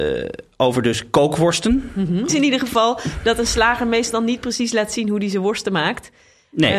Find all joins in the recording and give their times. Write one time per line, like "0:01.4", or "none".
0:02.3